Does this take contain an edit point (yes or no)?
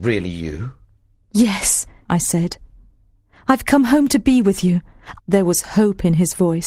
yes